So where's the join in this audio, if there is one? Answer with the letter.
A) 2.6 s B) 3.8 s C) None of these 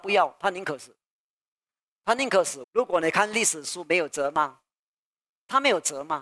A